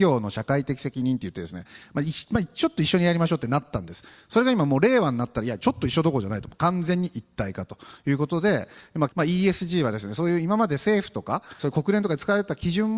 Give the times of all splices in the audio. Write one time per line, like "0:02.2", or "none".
0:09.1
0:11.6

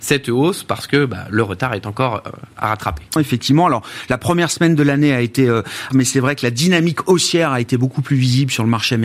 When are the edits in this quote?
0:03.2
0:05.9

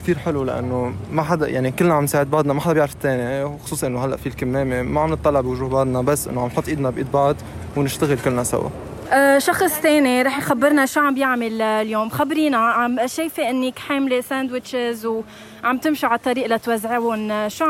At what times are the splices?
0:09.0

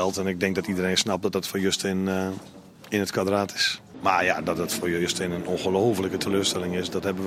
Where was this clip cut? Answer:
0:03.9

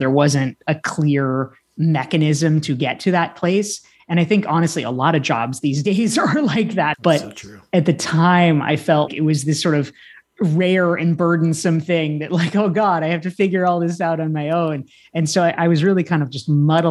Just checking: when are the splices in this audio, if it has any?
0:06.9
0:09.1

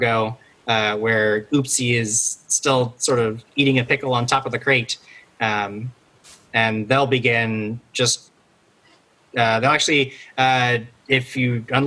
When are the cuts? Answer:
0:11.0

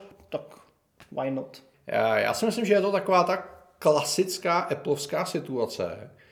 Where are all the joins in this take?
0:01.7

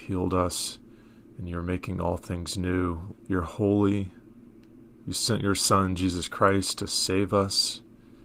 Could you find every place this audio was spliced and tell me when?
0:03.1

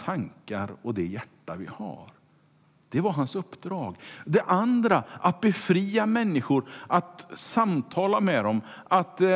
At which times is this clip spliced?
none

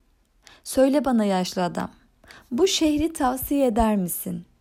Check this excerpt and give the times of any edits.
none

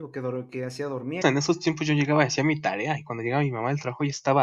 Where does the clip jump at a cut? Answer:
0:01.2

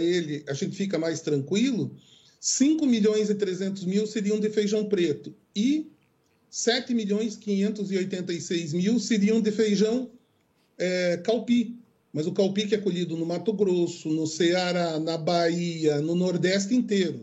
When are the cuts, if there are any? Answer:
none

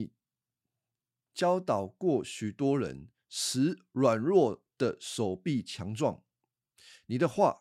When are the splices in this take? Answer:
none

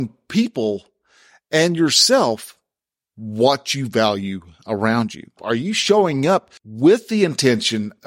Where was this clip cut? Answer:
0:05.4
0:06.6

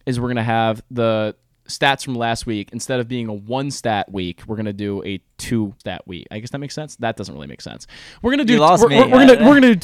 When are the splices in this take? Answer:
0:05.8

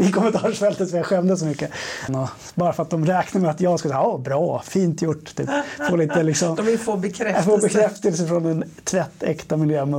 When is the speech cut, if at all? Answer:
0:02.1

